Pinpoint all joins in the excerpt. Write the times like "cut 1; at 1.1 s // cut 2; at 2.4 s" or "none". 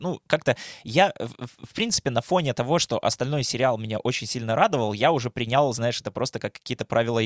none